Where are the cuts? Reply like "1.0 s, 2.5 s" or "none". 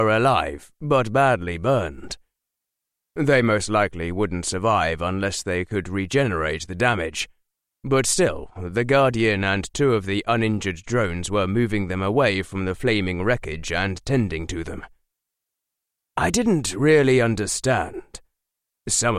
none